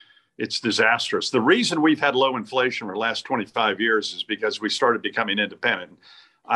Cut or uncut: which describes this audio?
uncut